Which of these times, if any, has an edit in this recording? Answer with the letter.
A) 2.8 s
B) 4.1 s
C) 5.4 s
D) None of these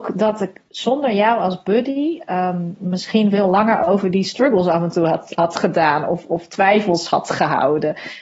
D